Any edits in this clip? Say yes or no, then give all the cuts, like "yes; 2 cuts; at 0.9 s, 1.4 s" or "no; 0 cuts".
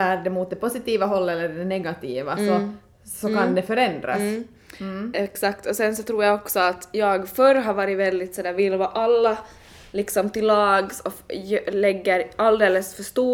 no; 0 cuts